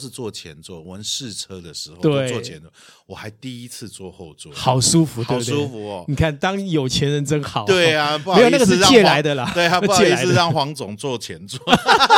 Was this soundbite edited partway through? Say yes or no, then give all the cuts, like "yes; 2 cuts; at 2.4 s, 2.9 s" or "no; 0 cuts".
no; 0 cuts